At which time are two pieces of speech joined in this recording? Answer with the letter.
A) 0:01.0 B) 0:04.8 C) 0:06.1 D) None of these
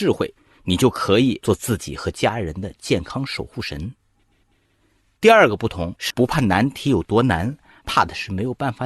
C